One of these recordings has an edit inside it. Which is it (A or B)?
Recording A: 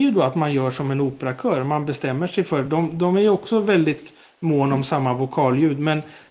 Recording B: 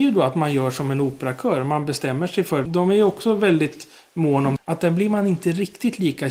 B